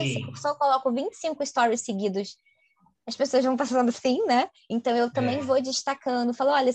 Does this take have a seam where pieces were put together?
no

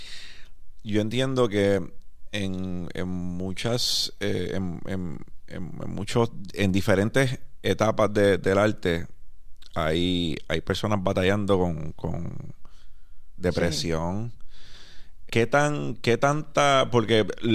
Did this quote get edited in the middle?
yes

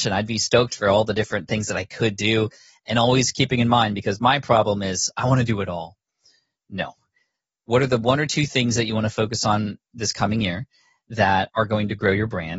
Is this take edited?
no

